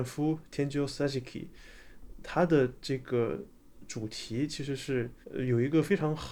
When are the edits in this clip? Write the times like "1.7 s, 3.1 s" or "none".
5.2 s